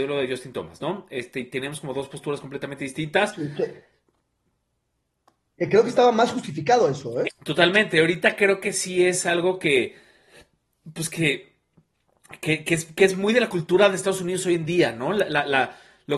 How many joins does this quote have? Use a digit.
1